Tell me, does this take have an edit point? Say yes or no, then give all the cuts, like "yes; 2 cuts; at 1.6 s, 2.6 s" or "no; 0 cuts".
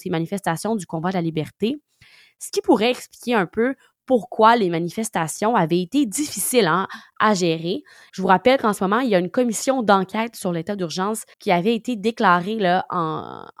yes; 2 cuts; at 8.1 s, 11.3 s